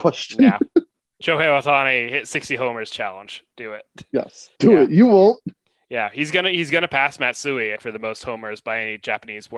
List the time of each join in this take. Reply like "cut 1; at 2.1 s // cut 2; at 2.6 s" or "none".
cut 1; at 4.5 s // cut 2; at 7.8 s

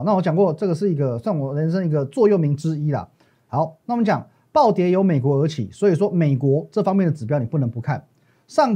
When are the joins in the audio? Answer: cut 1; at 3.3 s

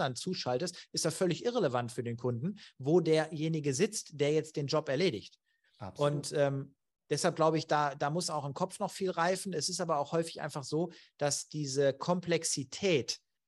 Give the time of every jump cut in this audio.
none

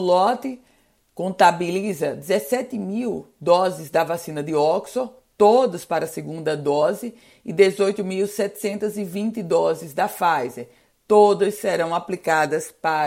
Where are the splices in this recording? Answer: none

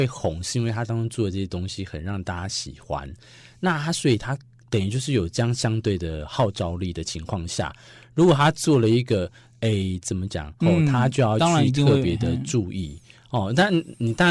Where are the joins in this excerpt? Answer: cut 1; at 10.6 s

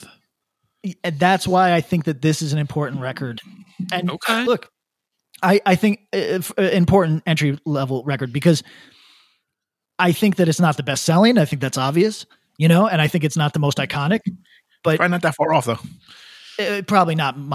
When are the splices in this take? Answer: none

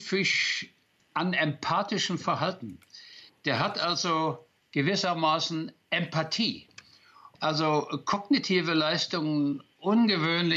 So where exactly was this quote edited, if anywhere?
cut 1; at 1.0 s // cut 2; at 7.3 s

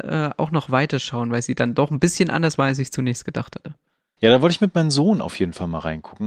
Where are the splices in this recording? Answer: cut 1; at 4.2 s

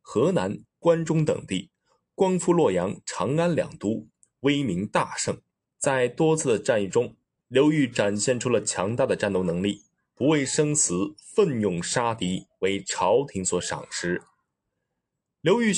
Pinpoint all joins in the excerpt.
cut 1; at 5.6 s

